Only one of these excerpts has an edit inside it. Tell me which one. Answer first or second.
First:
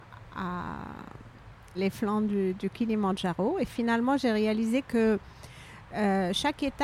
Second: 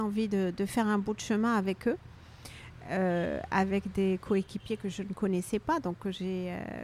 first